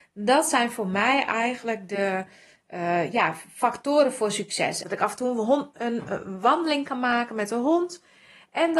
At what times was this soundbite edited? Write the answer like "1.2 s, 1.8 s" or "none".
4.8 s